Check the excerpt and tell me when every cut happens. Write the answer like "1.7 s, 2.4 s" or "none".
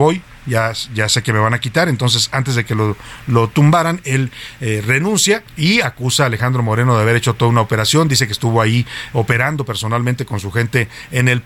5.5 s